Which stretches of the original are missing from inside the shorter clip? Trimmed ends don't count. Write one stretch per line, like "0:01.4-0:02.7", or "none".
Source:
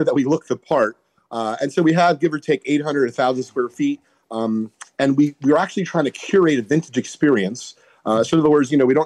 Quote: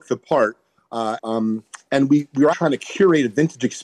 0:01.6-0:04.2
0:05.6-0:05.9